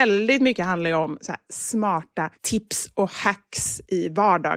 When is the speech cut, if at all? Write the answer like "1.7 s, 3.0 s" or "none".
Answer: none